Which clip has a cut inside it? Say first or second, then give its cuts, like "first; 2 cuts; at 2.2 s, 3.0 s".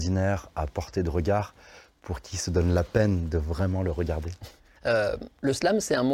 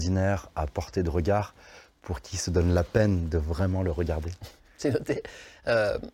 first; 1 cut; at 4.8 s